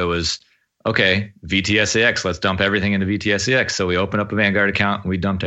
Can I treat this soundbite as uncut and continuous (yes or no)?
yes